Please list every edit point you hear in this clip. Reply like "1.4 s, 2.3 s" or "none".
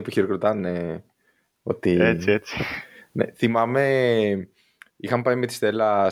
none